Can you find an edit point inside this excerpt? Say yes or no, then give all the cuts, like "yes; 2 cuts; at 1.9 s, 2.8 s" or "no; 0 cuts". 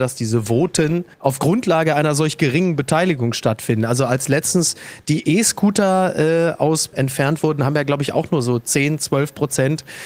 yes; 2 cuts; at 1.1 s, 6.9 s